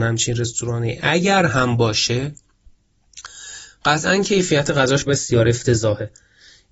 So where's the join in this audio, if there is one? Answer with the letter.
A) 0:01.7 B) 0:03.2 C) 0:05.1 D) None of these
C